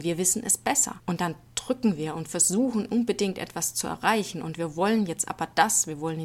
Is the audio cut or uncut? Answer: cut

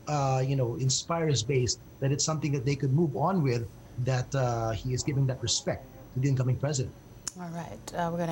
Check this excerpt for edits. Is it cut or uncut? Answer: uncut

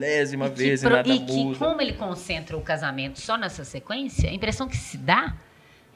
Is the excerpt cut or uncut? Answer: uncut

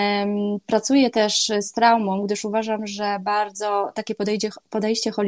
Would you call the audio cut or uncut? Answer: uncut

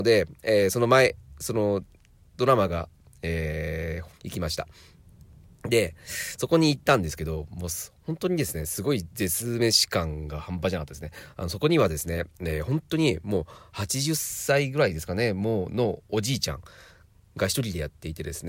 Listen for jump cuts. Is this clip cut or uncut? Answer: cut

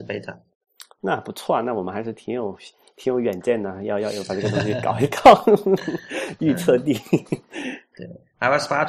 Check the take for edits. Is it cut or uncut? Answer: uncut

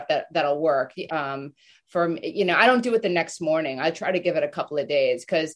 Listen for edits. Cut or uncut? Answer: cut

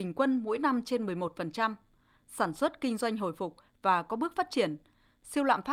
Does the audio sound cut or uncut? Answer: uncut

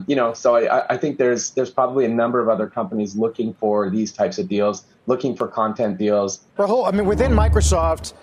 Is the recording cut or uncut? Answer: cut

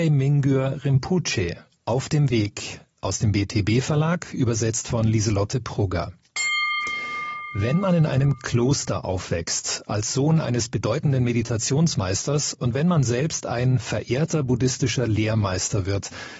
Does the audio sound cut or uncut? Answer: uncut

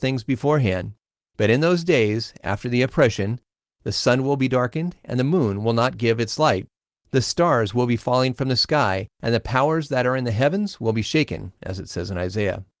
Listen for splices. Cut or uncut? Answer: cut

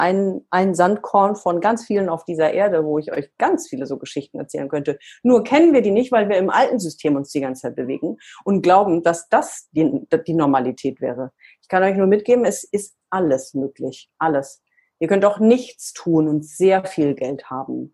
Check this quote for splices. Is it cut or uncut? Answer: uncut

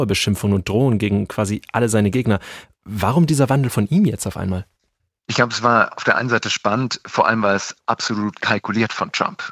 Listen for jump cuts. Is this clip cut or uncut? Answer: uncut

